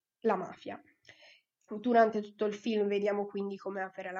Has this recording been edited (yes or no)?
yes